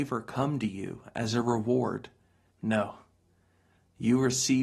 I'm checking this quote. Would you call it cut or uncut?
cut